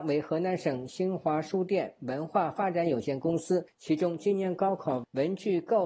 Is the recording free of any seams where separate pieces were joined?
yes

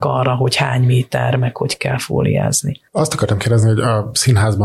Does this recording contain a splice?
no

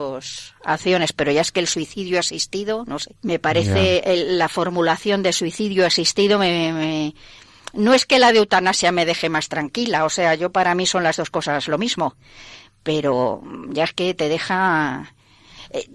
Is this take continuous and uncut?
no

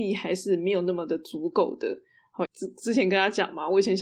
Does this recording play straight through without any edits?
no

